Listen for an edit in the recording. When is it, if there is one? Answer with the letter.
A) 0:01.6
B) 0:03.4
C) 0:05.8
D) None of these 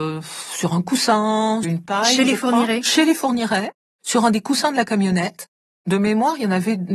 A